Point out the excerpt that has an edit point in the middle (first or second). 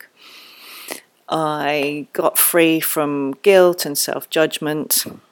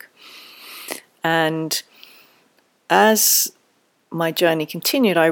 second